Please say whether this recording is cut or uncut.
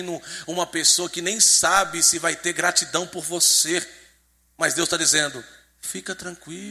uncut